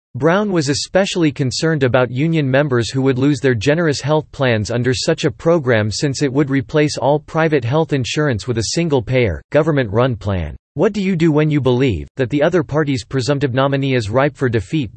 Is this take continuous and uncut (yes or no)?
no